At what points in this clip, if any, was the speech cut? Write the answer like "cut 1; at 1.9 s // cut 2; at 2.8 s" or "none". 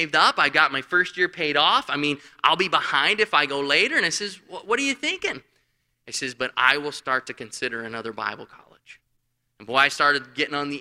cut 1; at 6.0 s